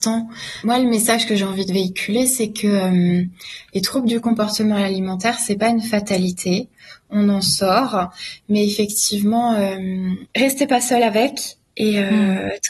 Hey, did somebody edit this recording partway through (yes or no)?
no